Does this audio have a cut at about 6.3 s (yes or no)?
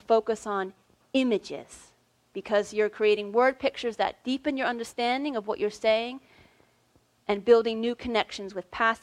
no